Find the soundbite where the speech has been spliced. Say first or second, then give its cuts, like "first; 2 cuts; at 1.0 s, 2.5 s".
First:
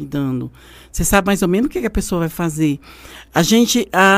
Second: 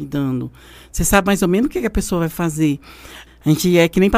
second; 1 cut; at 3.3 s